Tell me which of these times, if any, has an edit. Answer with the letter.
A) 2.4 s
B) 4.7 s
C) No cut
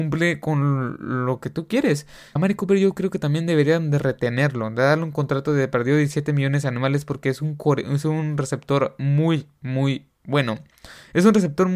A